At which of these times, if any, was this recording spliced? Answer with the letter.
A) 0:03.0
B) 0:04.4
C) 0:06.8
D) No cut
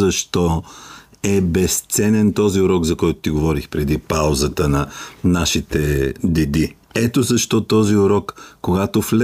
C